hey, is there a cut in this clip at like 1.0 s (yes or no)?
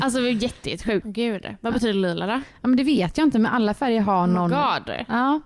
yes